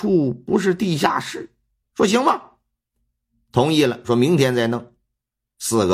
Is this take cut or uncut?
cut